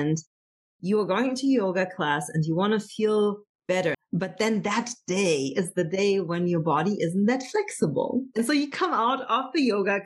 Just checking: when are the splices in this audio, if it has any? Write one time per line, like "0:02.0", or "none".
0:03.9

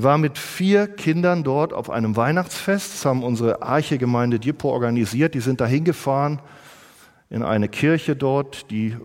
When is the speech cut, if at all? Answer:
none

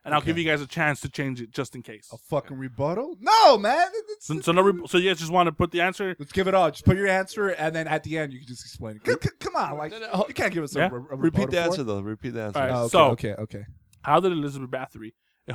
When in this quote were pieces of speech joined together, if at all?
none

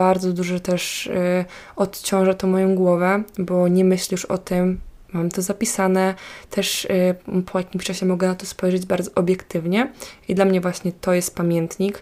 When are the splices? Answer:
none

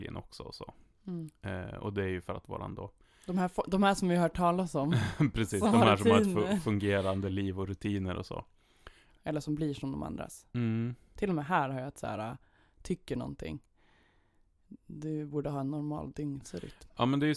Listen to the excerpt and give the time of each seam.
0:09.2

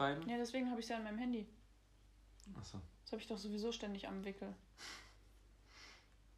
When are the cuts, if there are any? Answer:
none

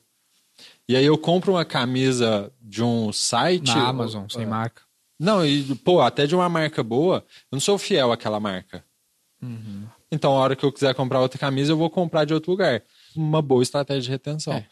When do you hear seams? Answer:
0:13.2

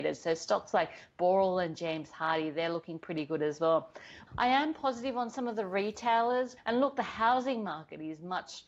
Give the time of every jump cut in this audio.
0:04.3
0:06.6

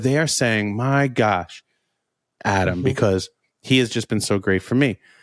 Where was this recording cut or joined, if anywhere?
0:02.4

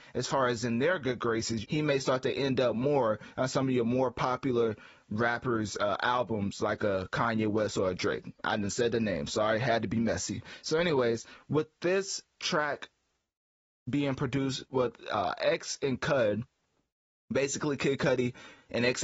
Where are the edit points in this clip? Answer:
0:01.6

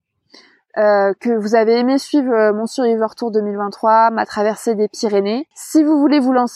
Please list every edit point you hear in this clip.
0:05.5

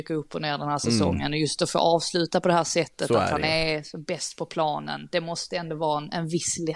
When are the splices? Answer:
none

